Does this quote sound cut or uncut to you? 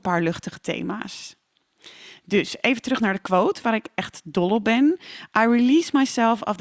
uncut